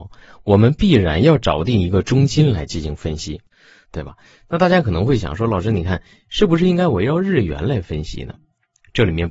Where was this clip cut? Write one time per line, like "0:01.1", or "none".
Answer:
0:03.8